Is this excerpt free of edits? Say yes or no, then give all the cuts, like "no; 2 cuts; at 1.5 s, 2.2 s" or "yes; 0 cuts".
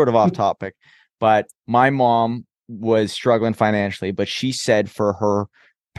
yes; 0 cuts